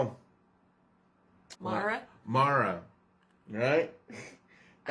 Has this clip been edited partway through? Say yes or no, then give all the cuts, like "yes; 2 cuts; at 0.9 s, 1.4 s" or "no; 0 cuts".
yes; 1 cut; at 1.5 s